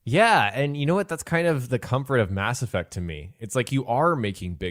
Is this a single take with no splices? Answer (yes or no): yes